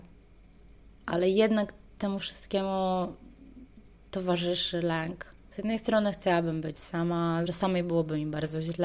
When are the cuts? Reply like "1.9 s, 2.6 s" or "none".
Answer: 5.5 s, 7.5 s